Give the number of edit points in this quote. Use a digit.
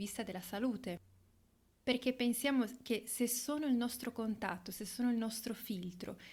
0